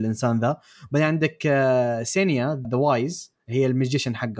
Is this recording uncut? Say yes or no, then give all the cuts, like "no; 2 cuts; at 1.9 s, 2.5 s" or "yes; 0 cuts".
no; 1 cut; at 2.6 s